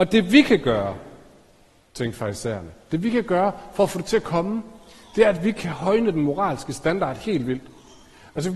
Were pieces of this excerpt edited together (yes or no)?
no